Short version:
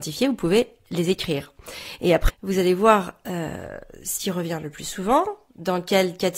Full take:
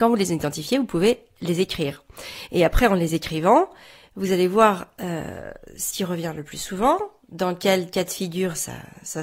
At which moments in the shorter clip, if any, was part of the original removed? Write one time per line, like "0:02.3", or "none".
0:02.3